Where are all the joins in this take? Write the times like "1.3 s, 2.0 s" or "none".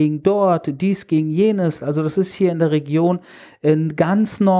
none

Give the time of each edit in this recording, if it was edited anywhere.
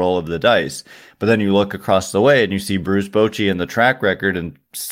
none

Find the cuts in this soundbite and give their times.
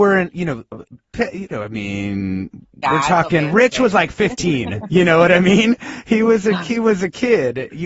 none

